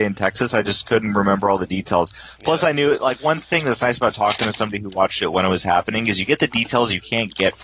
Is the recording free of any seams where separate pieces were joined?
yes; 0 cuts

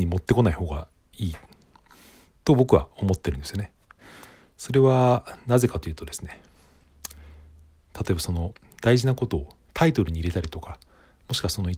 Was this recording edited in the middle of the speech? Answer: no; 0 cuts

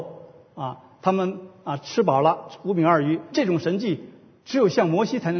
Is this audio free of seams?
no; 1 cut; at 3.3 s

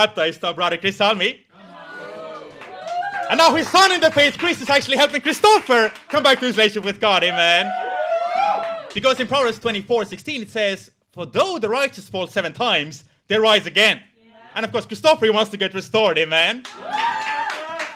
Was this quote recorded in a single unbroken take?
yes; 0 cuts

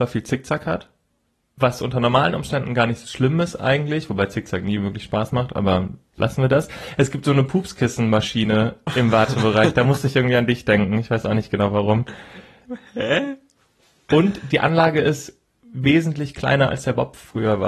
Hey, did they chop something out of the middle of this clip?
no; 0 cuts

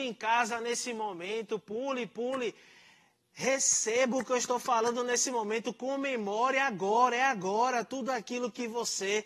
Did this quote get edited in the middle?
no; 0 cuts

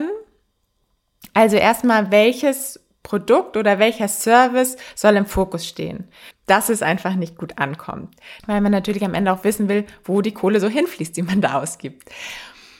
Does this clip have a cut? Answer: yes; 2 cuts; at 6.3 s, 8.4 s

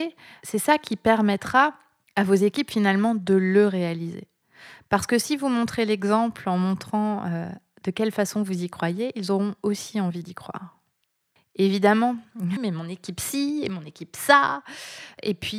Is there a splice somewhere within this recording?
yes; 1 cut; at 12.6 s

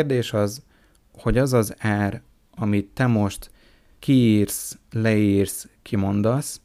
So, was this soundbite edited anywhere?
no; 0 cuts

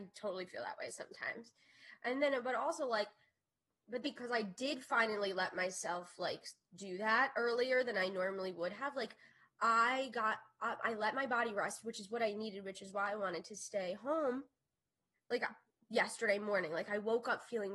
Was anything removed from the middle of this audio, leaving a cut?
yes; 2 cuts; at 4.0 s, 15.1 s

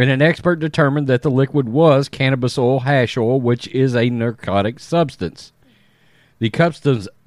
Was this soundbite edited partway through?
no; 0 cuts

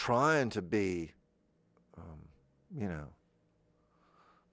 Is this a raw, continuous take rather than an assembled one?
yes; 0 cuts

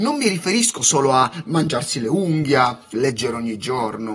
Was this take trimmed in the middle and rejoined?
yes; 1 cut; at 2.9 s

